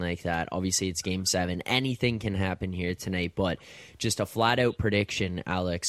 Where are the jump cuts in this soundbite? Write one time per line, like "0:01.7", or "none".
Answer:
none